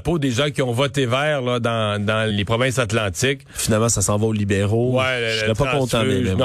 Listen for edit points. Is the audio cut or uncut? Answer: cut